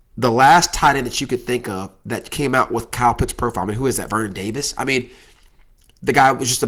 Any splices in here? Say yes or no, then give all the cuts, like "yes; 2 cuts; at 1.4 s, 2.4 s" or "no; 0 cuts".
no; 0 cuts